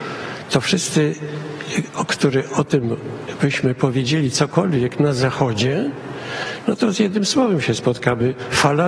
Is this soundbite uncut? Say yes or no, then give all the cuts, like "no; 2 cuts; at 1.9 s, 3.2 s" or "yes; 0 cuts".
yes; 0 cuts